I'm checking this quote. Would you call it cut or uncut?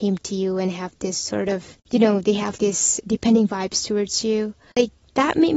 cut